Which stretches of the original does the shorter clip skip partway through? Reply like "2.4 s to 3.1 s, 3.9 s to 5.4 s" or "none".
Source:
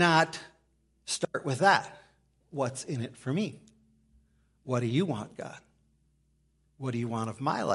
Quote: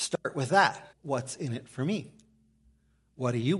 2.0 s to 2.4 s